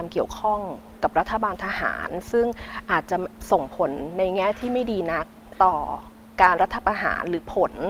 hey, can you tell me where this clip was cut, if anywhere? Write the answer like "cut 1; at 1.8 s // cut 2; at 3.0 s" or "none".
cut 1; at 6.6 s

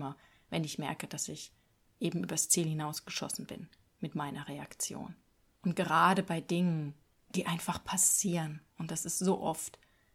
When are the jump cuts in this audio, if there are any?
none

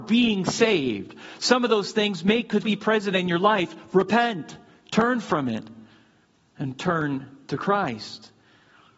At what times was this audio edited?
cut 1; at 2.6 s

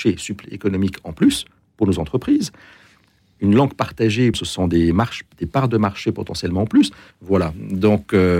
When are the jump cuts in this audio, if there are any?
cut 1; at 4.3 s // cut 2; at 7.1 s

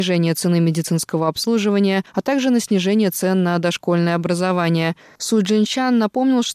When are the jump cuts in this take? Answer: cut 1; at 5.2 s

